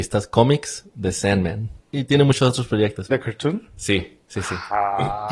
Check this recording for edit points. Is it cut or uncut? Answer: cut